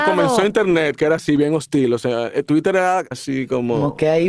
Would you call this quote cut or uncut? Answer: cut